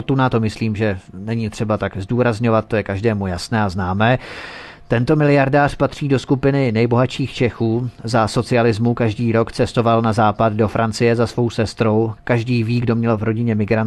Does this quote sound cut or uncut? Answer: uncut